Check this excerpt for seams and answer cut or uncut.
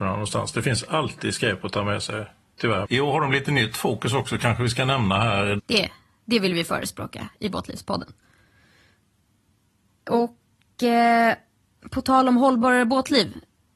cut